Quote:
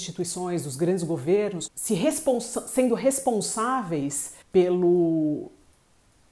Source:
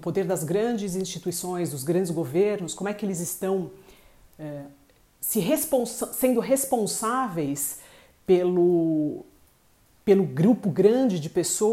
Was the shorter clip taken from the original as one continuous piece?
no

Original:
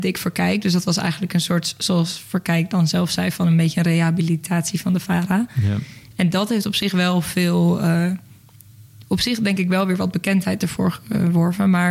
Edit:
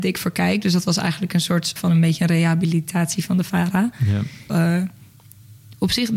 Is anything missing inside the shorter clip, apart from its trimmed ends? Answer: yes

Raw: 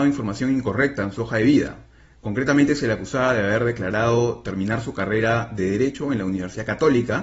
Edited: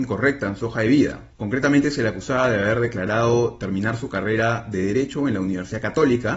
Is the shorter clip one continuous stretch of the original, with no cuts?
no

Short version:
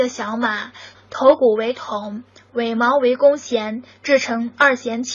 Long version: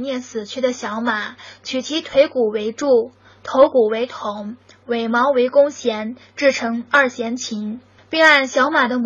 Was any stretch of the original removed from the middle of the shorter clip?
yes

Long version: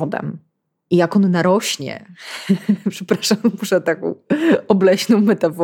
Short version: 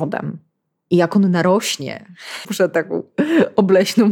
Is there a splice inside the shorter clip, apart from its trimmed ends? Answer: yes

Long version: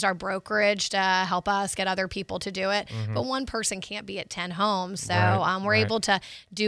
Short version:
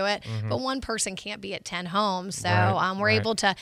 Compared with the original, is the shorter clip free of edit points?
yes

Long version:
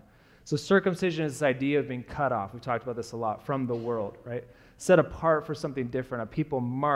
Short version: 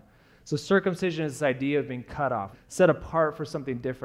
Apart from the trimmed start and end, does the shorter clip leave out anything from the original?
yes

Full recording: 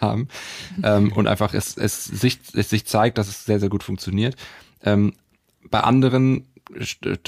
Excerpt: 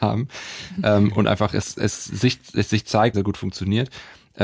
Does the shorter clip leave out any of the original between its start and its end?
yes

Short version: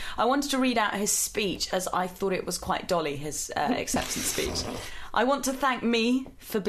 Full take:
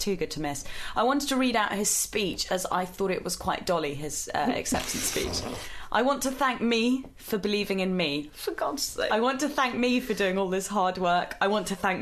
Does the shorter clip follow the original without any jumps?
yes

